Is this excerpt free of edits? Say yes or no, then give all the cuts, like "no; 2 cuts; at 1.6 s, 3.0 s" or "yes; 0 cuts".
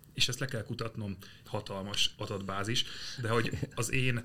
no; 1 cut; at 1.4 s